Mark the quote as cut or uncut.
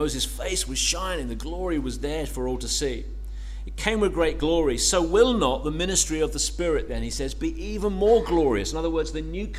uncut